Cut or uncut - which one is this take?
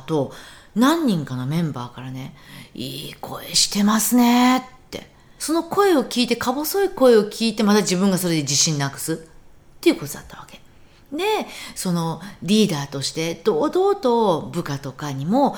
cut